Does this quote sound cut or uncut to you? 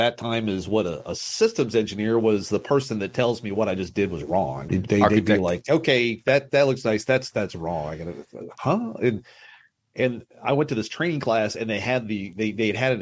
cut